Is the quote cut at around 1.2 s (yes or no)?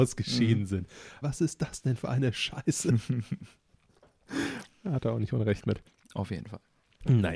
yes